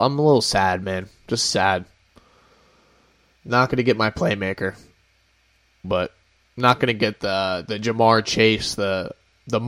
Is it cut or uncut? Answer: cut